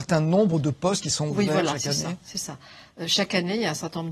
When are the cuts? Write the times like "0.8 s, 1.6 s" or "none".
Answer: none